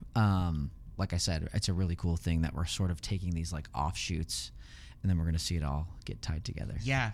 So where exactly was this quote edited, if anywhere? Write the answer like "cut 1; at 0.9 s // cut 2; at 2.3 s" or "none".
cut 1; at 0.9 s